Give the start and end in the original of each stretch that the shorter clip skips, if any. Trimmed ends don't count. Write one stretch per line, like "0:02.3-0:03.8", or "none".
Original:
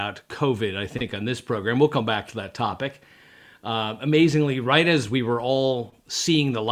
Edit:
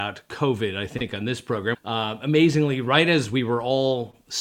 0:01.7-0:03.5